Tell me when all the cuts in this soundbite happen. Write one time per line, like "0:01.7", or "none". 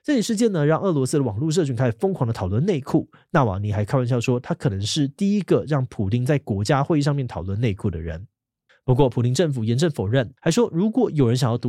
0:08.7
0:10.4